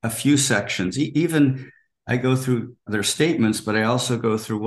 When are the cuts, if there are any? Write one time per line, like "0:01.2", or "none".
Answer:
0:02.9